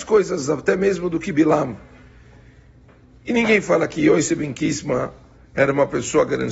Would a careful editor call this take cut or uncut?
uncut